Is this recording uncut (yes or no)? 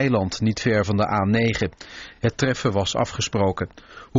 yes